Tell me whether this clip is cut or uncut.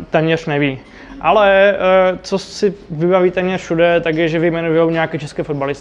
uncut